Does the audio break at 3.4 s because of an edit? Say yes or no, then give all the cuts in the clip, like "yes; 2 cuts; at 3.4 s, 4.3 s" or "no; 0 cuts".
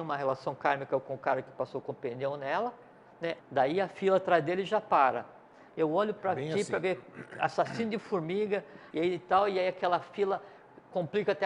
yes; 3 cuts; at 3.4 s, 5.7 s, 8.9 s